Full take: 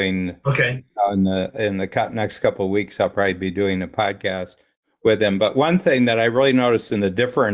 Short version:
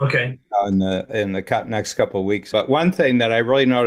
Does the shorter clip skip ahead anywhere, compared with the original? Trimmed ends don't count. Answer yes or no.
yes